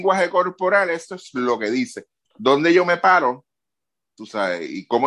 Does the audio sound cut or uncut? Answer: uncut